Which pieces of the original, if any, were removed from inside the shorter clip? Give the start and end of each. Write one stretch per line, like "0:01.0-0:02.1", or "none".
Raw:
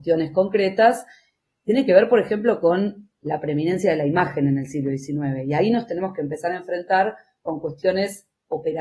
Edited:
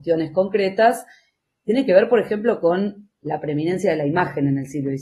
none

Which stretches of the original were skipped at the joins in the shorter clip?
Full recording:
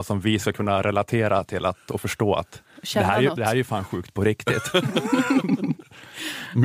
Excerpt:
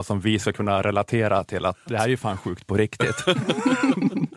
0:01.9-0:03.3

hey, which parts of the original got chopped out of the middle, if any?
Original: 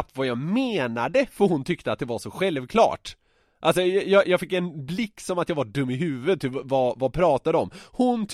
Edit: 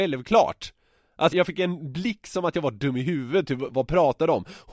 0:03.7-0:04.2
0:06.6-0:06.9

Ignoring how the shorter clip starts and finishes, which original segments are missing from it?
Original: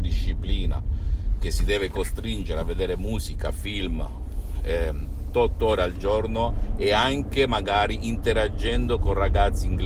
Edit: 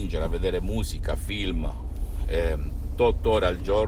none

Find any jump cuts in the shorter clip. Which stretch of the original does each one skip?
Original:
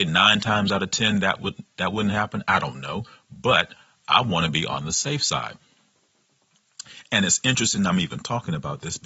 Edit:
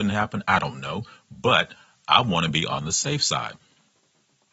none

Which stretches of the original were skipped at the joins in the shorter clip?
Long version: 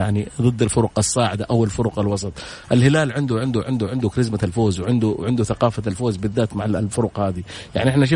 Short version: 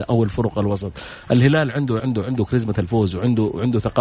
0:03.4-0:03.6

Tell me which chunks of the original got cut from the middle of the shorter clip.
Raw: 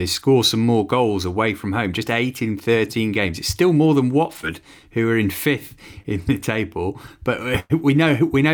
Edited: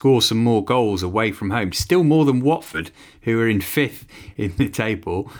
0:01.9-0:03.4

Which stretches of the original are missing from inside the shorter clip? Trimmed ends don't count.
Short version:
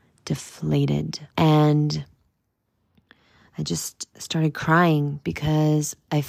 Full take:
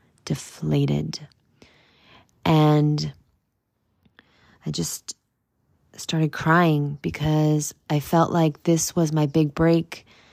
0:01.3-0:02.4
0:05.2-0:05.9

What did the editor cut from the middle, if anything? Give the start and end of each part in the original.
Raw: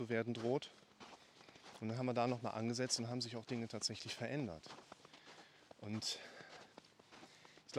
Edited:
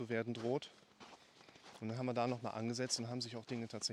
none

